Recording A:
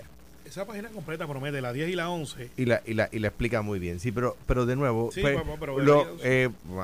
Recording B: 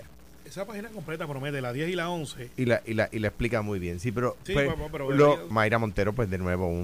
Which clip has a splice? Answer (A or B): B